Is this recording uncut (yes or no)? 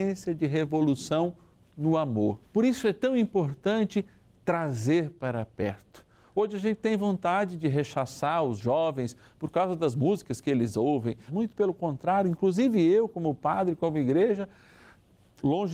no